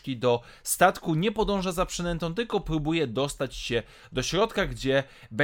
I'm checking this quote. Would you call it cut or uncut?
uncut